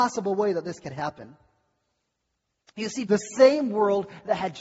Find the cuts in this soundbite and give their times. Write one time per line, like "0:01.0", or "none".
0:03.1